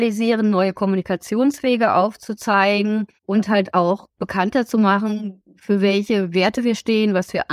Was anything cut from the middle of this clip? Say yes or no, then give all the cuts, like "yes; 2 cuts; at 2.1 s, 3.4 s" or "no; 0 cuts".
yes; 1 cut; at 3.2 s